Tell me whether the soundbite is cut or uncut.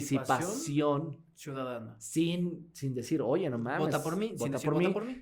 uncut